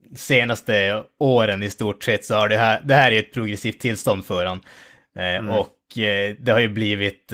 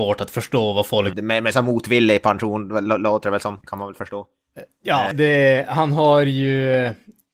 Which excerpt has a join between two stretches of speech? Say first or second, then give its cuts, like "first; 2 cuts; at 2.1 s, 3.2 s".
second; 2 cuts; at 1.1 s, 5.1 s